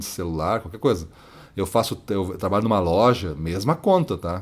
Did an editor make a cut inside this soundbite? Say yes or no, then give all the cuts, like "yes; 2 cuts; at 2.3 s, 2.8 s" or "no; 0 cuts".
no; 0 cuts